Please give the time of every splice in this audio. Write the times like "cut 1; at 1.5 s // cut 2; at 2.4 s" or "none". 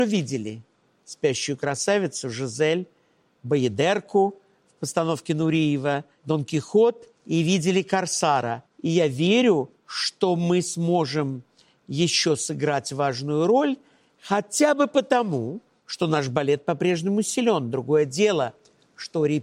cut 1; at 8.7 s